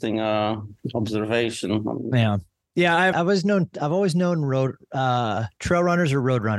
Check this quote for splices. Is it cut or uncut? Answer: cut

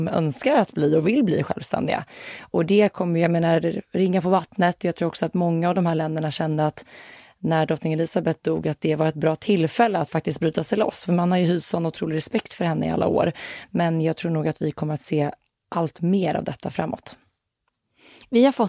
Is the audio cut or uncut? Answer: uncut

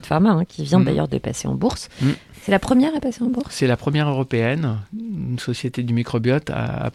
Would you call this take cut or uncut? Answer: uncut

